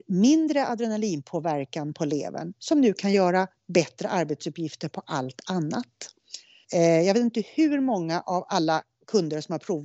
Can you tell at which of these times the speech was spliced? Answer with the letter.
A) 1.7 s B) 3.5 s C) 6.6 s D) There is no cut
C